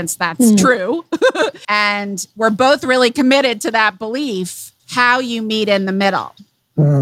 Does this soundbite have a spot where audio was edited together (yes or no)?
yes